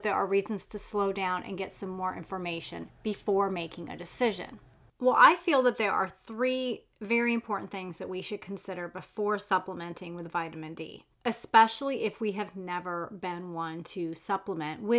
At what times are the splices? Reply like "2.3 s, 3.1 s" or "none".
4.9 s, 11.1 s